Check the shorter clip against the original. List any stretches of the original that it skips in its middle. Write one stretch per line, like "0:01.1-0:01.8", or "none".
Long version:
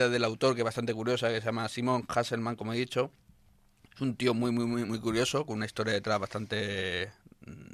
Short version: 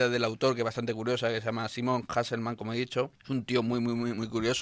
0:03.2-0:03.9